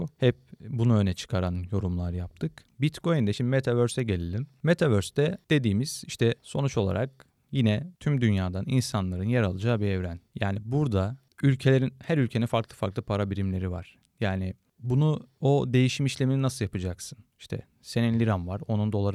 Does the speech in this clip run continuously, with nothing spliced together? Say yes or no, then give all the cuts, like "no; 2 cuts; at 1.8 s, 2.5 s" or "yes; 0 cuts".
yes; 0 cuts